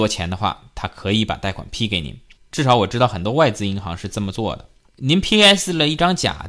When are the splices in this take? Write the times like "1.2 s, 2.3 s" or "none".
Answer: 2.3 s, 4.8 s